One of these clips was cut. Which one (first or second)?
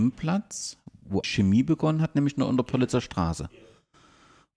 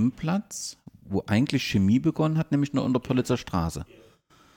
first